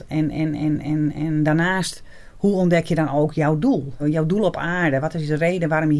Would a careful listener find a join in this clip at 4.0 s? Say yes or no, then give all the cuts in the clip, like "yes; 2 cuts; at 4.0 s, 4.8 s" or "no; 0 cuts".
yes; 1 cut; at 4.0 s